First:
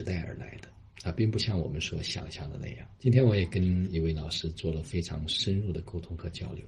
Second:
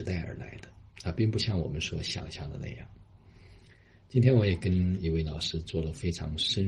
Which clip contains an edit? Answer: first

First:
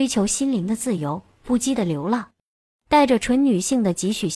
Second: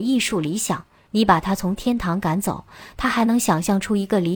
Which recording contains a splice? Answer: second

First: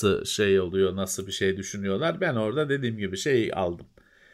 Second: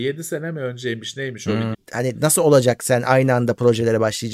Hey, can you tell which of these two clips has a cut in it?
second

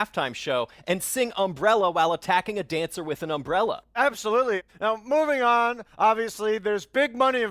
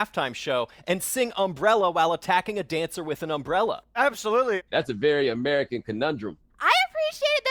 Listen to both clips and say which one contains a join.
second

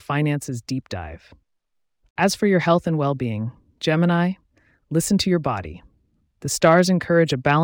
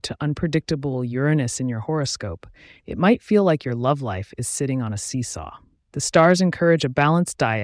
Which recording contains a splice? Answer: second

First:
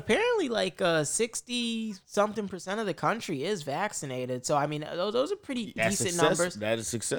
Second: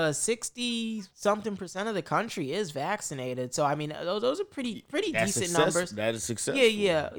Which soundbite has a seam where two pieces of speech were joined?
first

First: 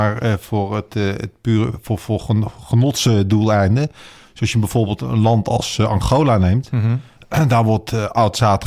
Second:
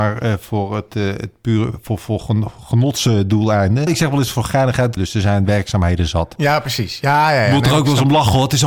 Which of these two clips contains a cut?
second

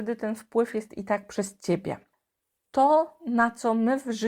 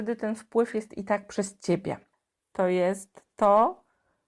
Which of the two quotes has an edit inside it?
second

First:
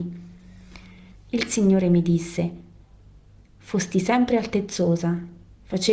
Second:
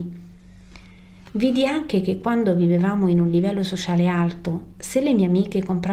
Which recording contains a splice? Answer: first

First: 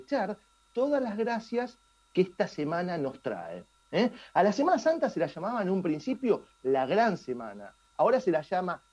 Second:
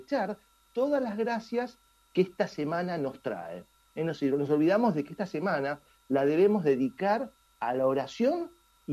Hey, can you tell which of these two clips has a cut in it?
second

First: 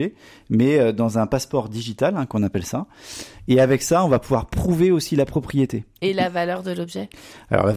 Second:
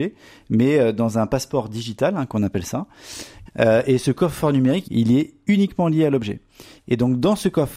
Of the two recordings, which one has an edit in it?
second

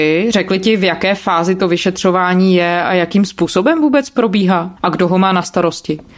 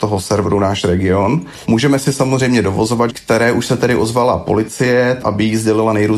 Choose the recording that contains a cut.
second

